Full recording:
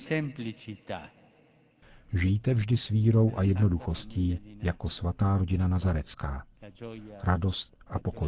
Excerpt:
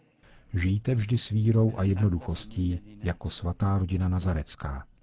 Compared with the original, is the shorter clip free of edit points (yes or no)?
yes